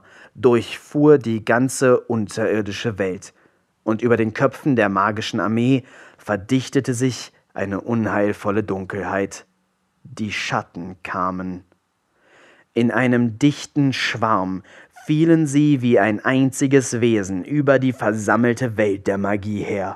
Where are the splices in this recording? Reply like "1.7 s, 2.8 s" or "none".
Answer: none